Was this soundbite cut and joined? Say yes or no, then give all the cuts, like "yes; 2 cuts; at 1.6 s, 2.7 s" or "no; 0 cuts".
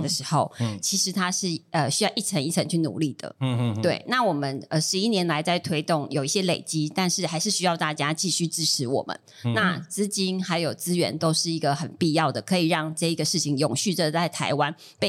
no; 0 cuts